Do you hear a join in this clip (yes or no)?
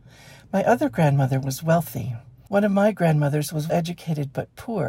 yes